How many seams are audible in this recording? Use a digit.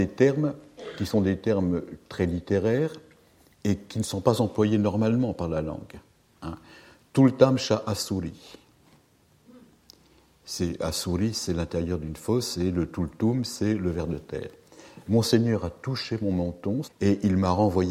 1